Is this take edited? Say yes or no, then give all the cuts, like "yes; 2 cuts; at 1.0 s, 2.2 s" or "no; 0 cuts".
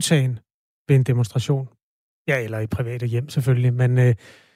no; 0 cuts